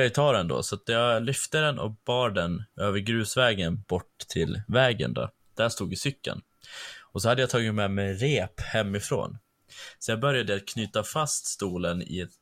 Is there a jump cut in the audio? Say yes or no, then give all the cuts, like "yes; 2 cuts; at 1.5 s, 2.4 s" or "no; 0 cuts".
no; 0 cuts